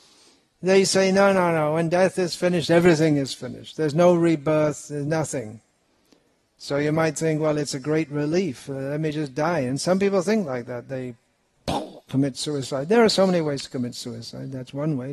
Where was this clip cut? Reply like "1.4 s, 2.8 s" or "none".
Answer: none